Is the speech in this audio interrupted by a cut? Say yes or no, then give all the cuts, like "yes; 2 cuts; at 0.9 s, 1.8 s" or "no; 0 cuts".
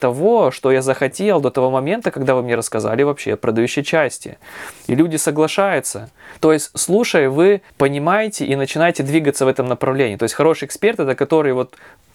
yes; 2 cuts; at 6.4 s, 7.7 s